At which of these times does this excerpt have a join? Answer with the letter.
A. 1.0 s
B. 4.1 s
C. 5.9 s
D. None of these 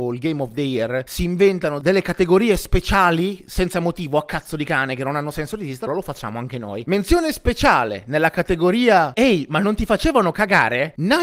C